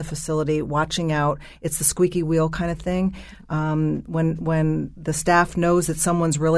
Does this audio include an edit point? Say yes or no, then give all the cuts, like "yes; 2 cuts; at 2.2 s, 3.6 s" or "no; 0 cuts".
no; 0 cuts